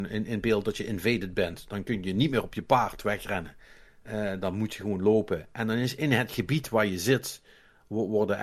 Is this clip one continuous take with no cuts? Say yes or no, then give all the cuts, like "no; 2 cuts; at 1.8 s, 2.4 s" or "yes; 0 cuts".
yes; 0 cuts